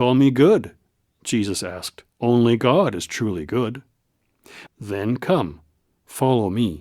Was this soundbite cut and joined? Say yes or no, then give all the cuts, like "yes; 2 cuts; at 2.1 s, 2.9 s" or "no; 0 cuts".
yes; 2 cuts; at 2.1 s, 4.7 s